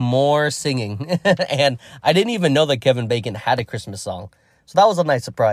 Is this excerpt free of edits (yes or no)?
yes